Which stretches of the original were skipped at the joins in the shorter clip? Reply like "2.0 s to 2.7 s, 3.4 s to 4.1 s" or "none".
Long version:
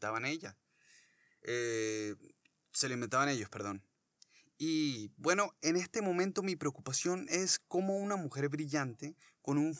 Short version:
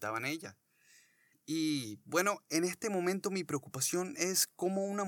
1.3 s to 4.4 s